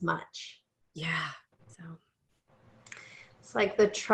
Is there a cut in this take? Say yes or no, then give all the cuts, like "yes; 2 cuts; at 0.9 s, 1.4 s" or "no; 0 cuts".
yes; 1 cut; at 1.5 s